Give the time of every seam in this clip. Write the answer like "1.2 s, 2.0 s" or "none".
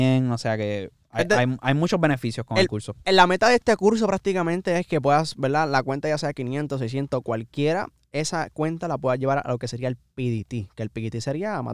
none